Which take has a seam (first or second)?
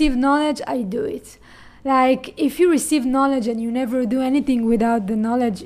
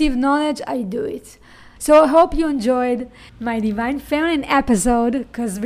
second